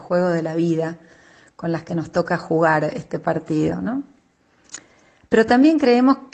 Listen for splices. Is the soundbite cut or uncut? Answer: uncut